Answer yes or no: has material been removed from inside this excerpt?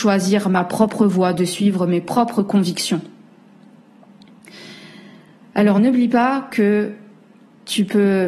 no